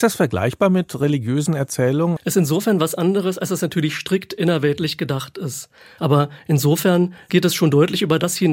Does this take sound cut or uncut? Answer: cut